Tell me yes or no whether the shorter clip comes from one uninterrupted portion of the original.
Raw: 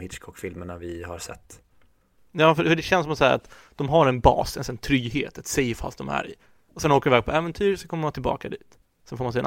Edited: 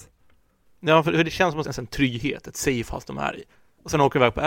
no